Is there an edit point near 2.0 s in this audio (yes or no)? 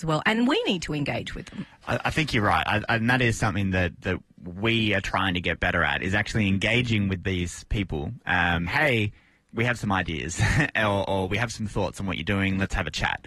no